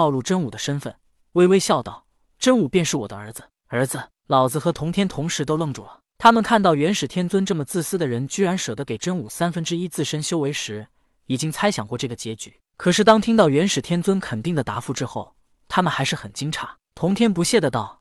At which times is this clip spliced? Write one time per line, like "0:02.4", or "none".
none